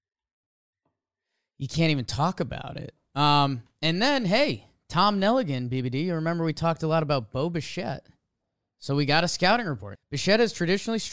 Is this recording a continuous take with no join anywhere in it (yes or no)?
no